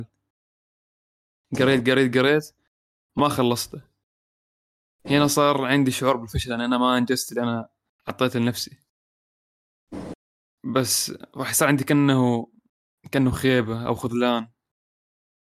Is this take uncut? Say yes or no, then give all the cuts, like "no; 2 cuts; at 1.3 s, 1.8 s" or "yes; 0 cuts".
no; 1 cut; at 2.1 s